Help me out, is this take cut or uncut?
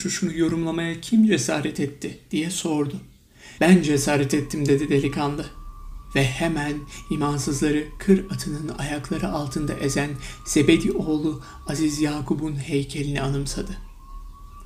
cut